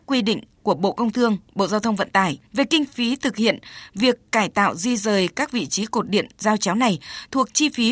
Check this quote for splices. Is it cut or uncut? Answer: cut